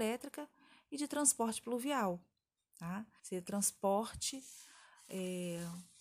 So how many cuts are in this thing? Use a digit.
1